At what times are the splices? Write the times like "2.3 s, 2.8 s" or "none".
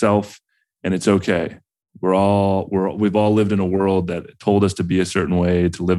none